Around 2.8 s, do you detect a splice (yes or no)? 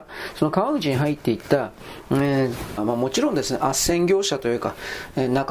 yes